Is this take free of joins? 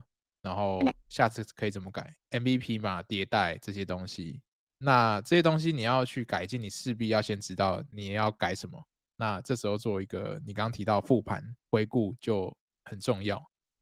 no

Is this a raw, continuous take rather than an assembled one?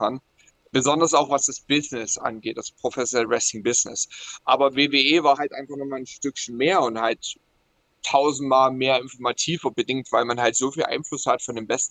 yes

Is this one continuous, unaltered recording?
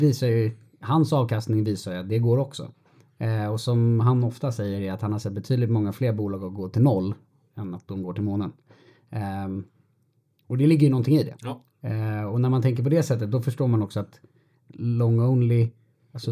yes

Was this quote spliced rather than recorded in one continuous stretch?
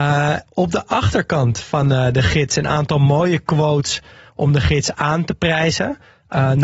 no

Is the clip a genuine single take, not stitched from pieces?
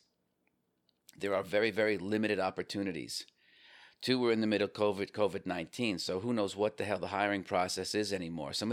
yes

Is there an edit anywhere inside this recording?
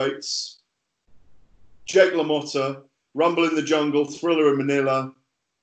no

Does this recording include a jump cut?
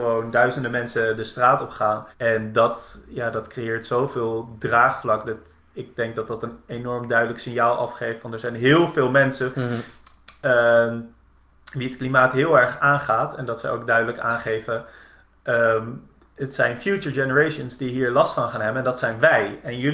yes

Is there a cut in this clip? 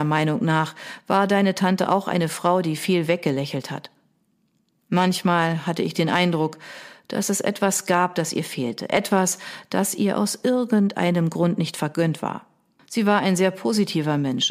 yes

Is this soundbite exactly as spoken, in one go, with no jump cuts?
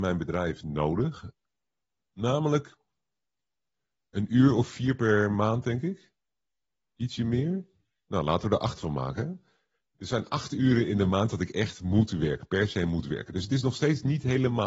yes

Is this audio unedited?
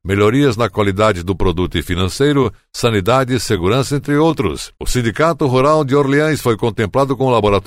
no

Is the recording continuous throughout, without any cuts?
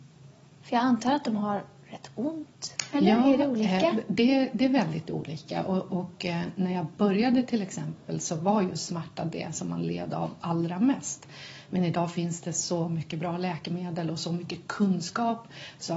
yes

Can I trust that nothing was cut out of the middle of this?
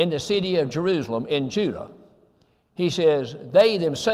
yes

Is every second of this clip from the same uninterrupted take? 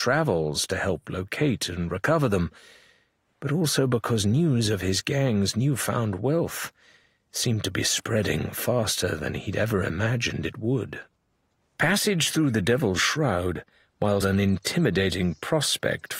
no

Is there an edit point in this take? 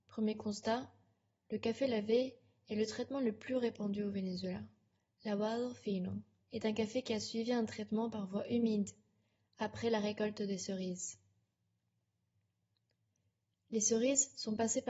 yes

